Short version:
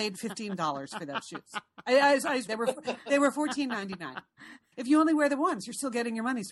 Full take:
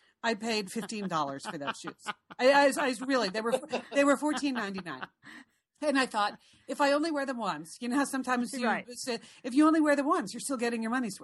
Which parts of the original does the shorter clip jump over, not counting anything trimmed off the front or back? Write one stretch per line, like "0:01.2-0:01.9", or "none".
0:03.0-0:03.3
0:05.6-0:09.4